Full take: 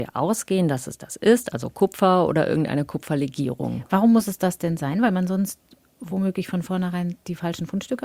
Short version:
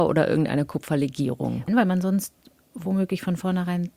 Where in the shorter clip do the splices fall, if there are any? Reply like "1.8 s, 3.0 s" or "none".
1.7 s